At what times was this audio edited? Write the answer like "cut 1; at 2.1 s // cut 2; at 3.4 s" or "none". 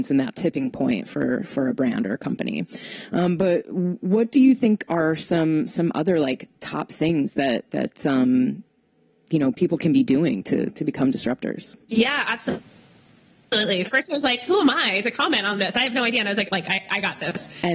cut 1; at 11.8 s // cut 2; at 13.9 s // cut 3; at 16.5 s